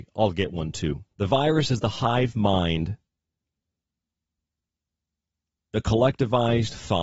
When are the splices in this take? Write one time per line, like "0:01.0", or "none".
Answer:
0:01.1